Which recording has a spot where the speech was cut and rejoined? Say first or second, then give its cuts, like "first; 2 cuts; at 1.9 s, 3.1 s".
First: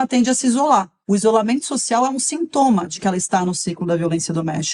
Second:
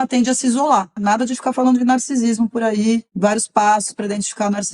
second; 1 cut; at 1.0 s